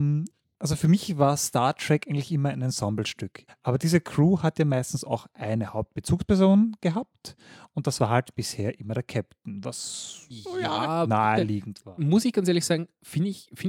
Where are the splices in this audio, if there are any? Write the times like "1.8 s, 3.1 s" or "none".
3.5 s